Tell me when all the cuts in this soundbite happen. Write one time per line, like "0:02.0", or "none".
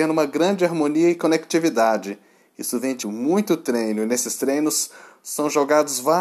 0:03.0